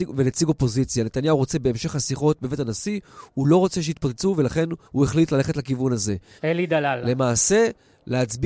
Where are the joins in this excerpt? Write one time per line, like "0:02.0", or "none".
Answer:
0:04.8
0:06.4